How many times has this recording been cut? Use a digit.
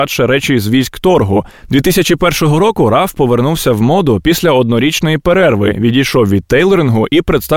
1